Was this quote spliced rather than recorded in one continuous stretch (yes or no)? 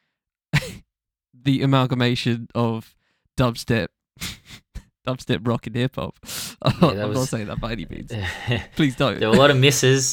no